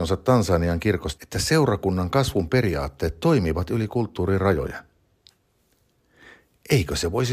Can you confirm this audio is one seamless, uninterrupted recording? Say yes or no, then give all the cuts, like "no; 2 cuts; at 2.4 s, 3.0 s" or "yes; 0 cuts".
no; 1 cut; at 1.2 s